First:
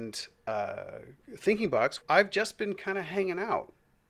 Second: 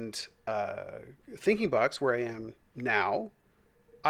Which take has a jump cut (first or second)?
first